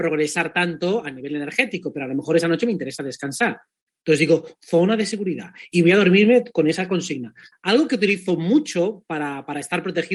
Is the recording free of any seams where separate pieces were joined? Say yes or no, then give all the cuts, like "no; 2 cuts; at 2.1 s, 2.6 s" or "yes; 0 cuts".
no; 1 cut; at 7.5 s